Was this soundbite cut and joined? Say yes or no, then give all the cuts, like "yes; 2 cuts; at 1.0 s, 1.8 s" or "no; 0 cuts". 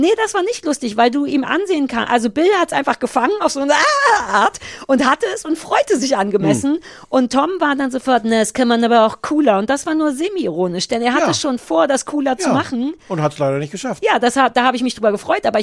no; 0 cuts